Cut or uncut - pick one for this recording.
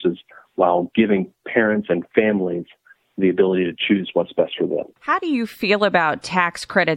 cut